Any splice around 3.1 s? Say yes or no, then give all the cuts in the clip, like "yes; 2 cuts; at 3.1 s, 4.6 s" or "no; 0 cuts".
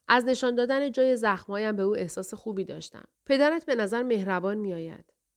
yes; 1 cut; at 3.1 s